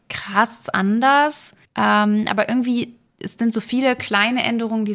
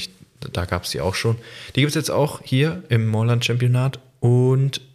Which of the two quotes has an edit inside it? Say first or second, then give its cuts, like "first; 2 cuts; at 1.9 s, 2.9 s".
first; 1 cut; at 1.6 s